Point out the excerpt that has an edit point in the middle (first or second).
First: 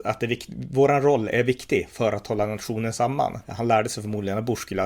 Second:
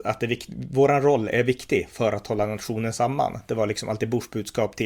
first